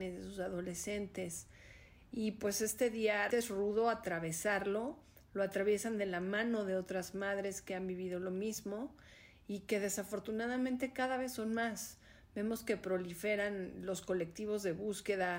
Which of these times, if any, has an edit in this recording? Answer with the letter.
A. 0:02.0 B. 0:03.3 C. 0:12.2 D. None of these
B